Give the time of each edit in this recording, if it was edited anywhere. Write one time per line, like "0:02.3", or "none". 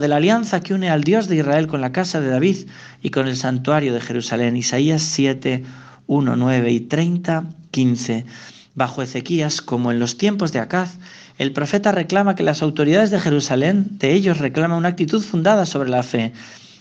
none